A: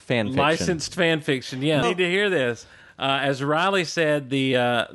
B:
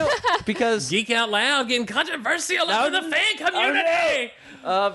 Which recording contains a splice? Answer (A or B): A